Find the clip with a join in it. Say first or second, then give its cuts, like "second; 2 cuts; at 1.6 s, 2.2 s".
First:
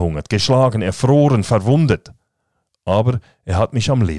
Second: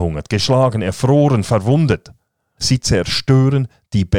second; 1 cut; at 2.6 s